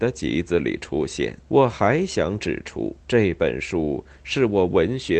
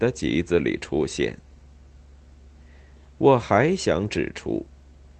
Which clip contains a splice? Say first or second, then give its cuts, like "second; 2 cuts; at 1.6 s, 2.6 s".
first; 2 cuts; at 1.4 s, 3.0 s